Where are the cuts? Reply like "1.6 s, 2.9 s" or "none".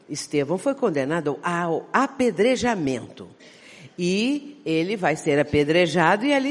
none